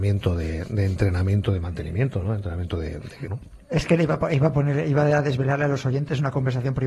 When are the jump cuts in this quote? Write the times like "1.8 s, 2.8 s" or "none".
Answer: 3.3 s